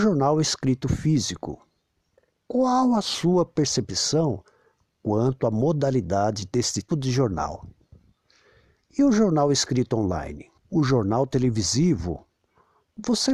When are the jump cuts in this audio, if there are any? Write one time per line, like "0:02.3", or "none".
0:06.9
0:10.6